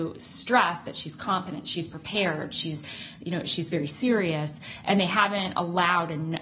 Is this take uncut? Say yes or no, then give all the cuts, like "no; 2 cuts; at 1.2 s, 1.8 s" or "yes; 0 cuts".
yes; 0 cuts